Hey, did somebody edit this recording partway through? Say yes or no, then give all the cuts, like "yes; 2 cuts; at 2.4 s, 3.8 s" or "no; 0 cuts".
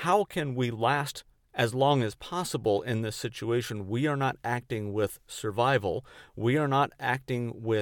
no; 0 cuts